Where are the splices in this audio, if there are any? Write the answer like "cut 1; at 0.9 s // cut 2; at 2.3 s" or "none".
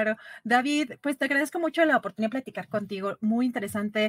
none